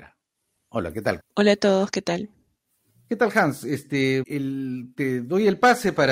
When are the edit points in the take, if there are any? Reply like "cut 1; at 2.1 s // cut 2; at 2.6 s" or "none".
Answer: cut 1; at 1.2 s // cut 2; at 2.9 s // cut 3; at 4.2 s